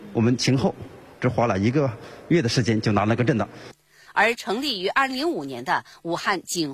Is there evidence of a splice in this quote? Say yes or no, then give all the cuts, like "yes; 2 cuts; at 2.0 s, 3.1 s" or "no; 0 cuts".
yes; 2 cuts; at 4.0 s, 5.1 s